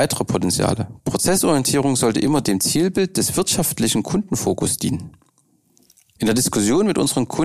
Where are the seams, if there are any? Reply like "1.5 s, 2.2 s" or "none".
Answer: 1.0 s, 6.2 s